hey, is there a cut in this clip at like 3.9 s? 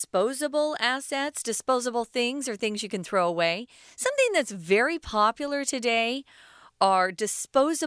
no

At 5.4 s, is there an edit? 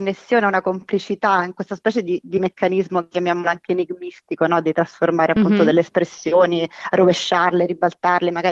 no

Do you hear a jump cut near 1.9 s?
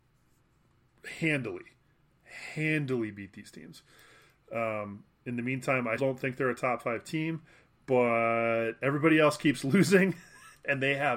no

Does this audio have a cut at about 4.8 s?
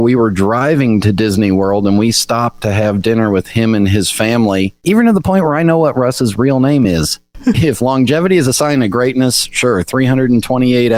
no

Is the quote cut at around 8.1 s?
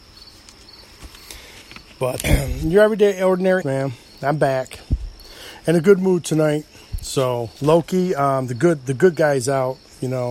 no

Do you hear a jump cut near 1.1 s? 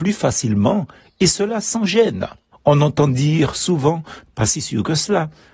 no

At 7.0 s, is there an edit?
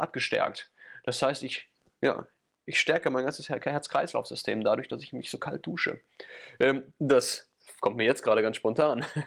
yes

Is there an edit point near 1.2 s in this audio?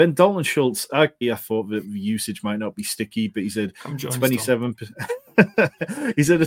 yes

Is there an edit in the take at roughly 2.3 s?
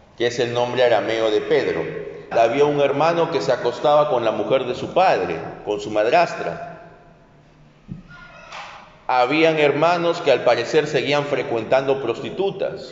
yes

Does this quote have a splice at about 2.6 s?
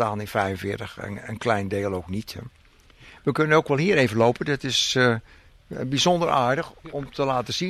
no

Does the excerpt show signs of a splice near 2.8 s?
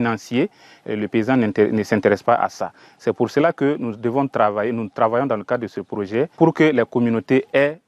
no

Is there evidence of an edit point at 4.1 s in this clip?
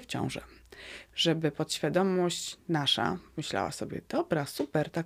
no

